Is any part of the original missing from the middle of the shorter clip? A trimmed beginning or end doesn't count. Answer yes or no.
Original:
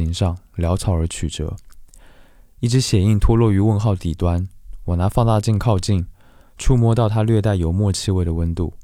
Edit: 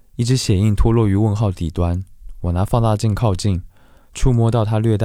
no